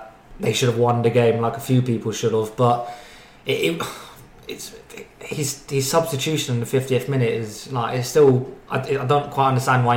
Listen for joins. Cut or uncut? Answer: uncut